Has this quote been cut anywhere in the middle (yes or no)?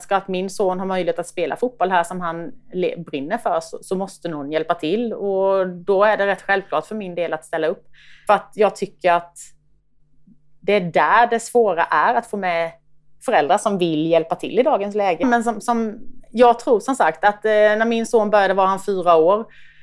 yes